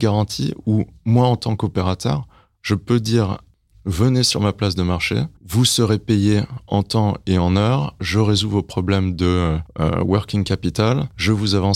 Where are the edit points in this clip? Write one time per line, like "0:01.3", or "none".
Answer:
0:05.4